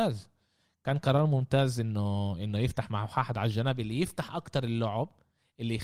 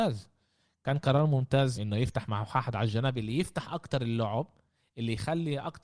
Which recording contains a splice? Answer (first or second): second